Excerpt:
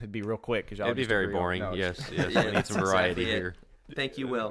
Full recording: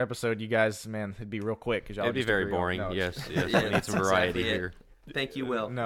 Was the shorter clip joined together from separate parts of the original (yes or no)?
no